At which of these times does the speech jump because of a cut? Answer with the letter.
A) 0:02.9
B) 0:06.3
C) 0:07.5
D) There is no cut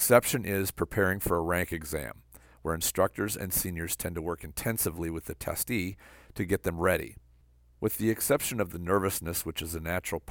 D